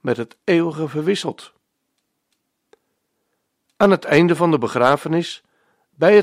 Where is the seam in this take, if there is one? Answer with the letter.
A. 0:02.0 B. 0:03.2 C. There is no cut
C